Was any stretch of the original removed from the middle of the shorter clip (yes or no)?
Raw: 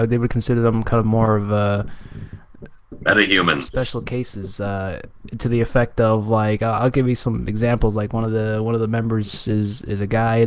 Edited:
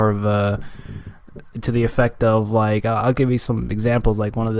yes